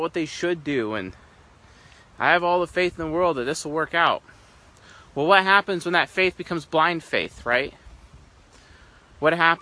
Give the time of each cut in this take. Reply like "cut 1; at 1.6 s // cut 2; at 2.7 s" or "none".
none